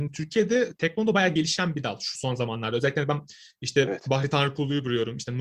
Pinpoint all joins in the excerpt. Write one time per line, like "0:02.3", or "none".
none